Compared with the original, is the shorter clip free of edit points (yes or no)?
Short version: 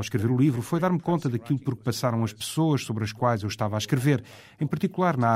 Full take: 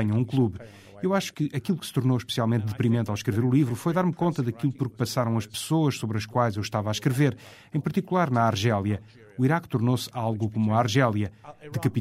yes